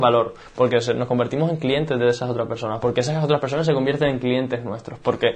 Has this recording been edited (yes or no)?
no